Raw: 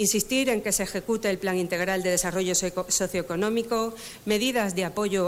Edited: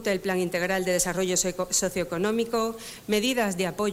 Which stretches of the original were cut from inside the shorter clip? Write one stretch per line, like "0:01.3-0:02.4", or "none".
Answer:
none